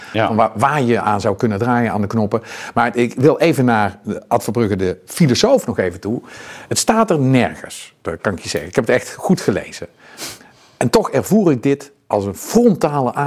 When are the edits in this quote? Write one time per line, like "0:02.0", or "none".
none

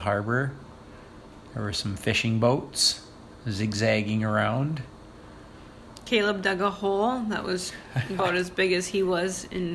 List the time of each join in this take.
none

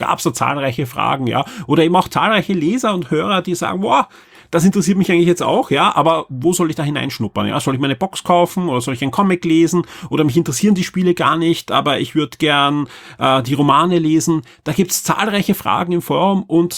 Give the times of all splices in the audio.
none

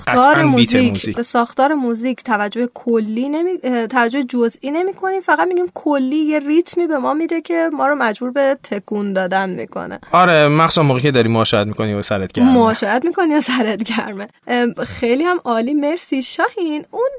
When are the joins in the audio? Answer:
0:01.1
0:14.4

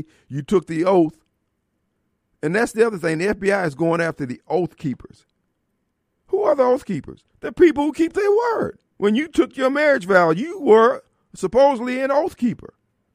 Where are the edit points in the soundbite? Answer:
0:08.9

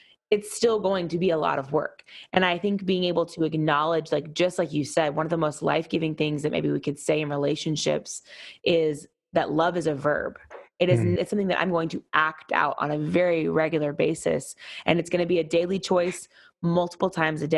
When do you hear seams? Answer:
0:11.2

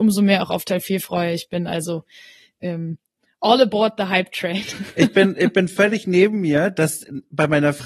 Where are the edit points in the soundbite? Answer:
none

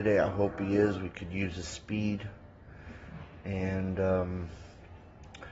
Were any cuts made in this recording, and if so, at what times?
none

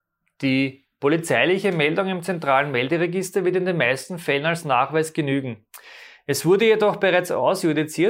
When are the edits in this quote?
none

